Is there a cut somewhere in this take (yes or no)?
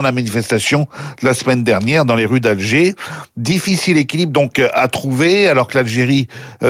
no